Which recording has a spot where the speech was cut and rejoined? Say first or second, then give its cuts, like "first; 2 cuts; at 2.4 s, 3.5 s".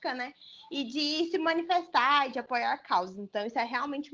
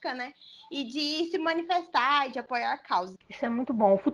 second; 1 cut; at 3.2 s